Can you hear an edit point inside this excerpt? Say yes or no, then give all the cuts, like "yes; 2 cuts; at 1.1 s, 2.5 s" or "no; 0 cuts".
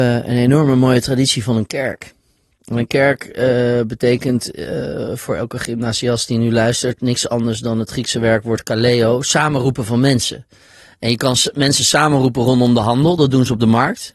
no; 0 cuts